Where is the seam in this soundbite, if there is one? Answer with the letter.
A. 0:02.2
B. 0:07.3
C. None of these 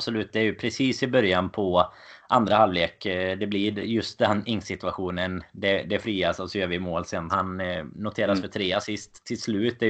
B